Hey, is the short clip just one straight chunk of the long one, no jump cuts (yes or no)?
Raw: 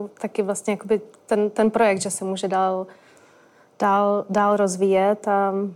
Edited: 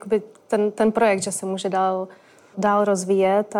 no